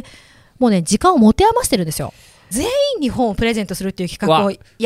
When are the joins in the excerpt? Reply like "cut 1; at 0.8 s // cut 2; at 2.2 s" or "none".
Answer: cut 1; at 2.5 s